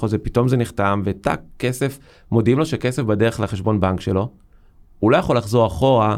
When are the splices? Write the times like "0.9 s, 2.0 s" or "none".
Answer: none